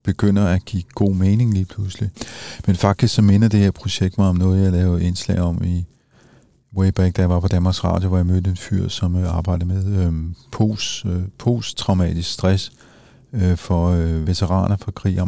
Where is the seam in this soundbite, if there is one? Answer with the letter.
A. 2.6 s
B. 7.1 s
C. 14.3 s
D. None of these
C